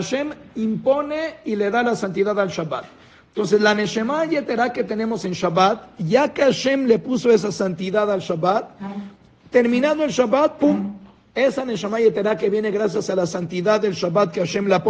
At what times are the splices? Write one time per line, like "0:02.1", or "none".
none